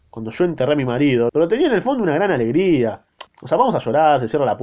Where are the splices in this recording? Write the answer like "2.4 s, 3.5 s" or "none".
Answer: 1.3 s, 3.3 s